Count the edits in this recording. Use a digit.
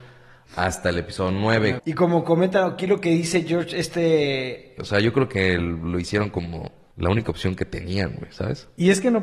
3